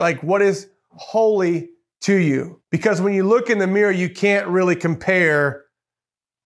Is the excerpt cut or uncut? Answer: cut